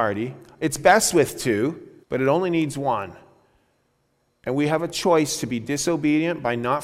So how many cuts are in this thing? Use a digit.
1